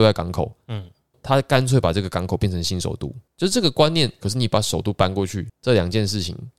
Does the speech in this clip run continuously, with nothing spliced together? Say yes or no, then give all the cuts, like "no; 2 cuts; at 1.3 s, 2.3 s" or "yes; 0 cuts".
no; 1 cut; at 4.2 s